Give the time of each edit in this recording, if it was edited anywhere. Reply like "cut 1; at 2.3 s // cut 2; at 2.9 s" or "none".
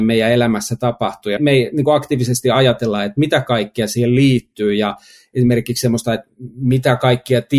cut 1; at 1.4 s